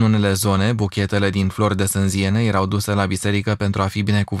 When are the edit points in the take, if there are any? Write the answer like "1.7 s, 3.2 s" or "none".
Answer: none